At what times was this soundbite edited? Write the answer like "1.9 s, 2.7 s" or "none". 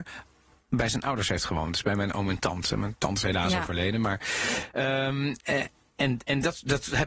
none